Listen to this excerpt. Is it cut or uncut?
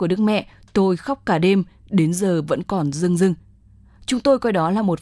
uncut